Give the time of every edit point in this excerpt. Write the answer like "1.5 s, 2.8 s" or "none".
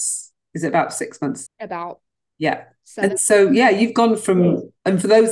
1.5 s